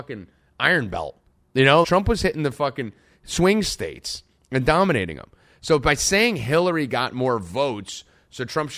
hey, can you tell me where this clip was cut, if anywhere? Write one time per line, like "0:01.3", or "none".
0:01.8

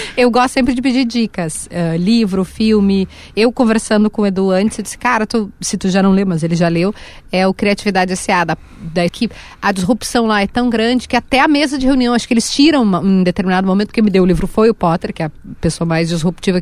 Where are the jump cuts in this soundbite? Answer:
0:09.1

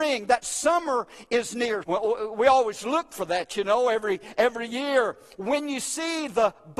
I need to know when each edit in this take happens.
0:01.8
0:05.4

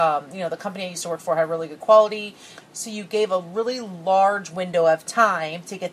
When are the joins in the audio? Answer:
0:02.5

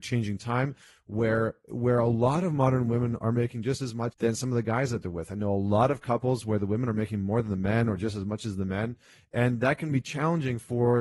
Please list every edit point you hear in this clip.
0:04.1

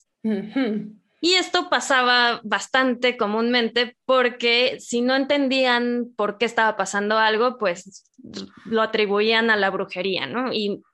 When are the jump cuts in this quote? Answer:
none

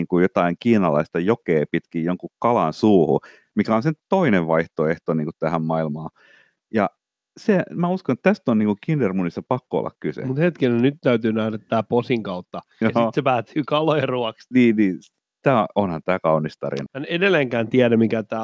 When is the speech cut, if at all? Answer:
0:12.8
0:14.5
0:16.9

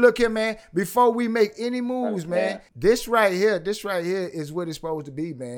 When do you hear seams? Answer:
0:02.7

